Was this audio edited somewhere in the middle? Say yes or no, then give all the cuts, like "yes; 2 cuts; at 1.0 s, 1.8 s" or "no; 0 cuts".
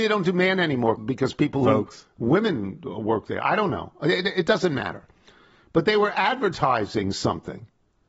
yes; 1 cut; at 1.0 s